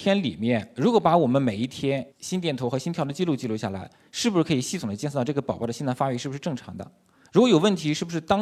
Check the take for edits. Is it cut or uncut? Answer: uncut